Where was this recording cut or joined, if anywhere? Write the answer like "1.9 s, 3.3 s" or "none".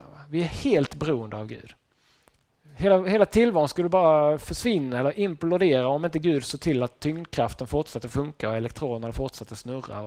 none